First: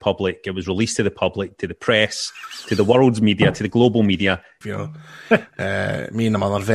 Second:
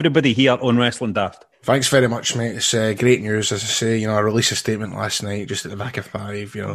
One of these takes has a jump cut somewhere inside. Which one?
first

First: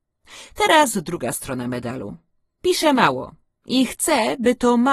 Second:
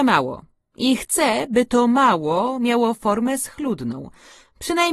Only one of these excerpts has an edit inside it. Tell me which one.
first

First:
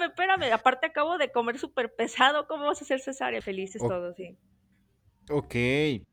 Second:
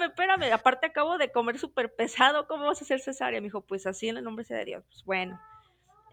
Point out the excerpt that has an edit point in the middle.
first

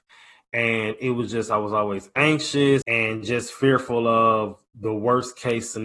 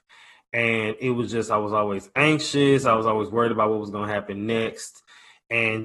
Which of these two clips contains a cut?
first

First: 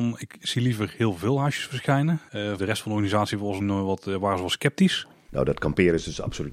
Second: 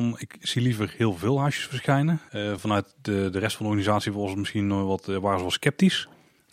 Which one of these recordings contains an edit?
first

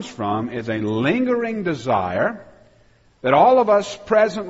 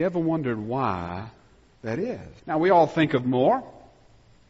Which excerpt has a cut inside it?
second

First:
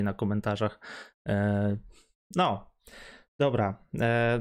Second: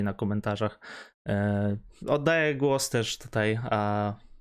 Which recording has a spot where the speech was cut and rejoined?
second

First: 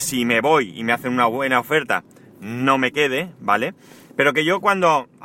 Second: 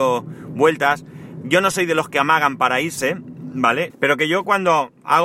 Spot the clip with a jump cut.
second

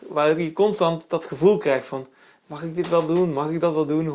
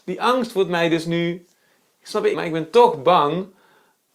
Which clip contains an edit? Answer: second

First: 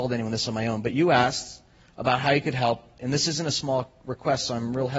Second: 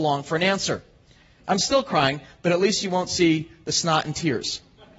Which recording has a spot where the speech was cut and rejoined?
second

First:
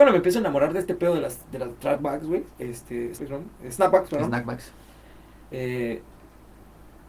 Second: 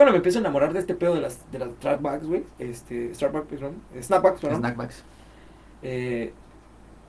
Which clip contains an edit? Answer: first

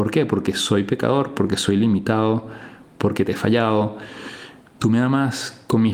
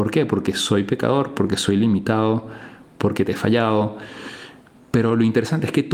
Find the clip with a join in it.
first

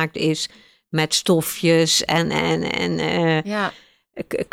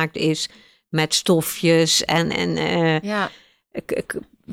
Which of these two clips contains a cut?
second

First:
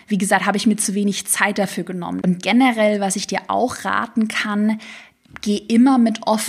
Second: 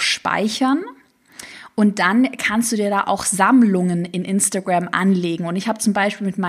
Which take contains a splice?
first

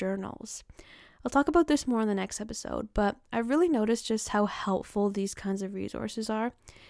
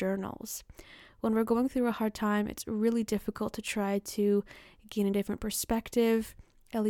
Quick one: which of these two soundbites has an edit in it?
second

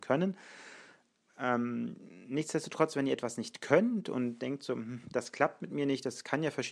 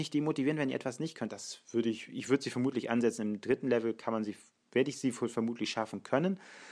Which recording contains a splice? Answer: second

